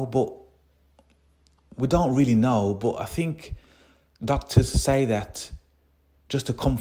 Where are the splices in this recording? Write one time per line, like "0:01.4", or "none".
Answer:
none